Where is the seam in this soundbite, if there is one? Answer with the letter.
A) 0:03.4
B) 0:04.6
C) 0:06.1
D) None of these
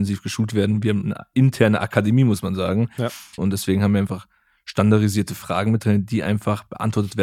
A